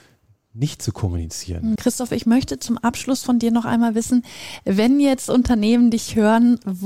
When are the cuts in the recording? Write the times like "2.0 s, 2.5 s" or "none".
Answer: 1.8 s

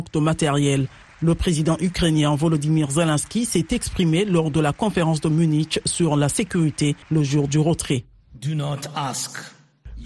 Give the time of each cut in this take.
7.0 s

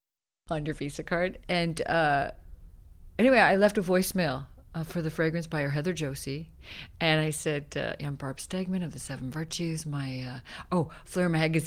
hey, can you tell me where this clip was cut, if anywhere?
none

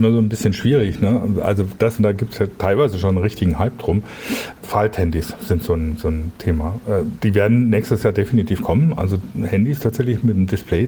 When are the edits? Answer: 2.0 s

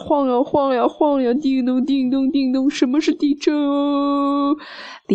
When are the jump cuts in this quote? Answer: none

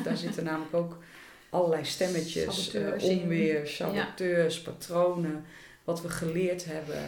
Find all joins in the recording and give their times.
none

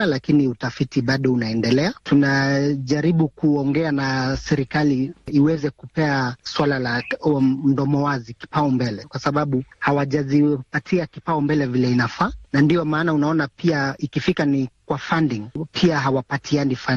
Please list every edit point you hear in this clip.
2.0 s

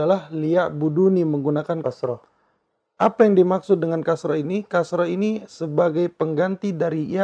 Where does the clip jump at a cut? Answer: 1.8 s

